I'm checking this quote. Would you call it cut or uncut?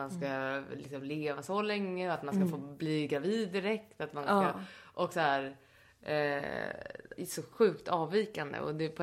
cut